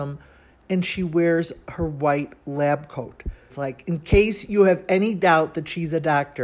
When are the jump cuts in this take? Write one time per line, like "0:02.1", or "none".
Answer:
0:03.5